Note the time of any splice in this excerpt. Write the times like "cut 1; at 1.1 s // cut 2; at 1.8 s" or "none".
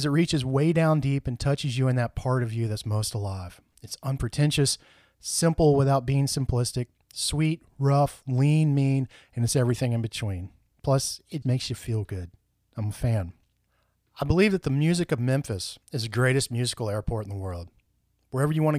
cut 1; at 11.4 s // cut 2; at 15.8 s